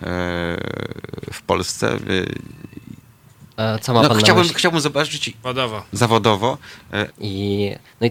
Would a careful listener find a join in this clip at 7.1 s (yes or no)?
yes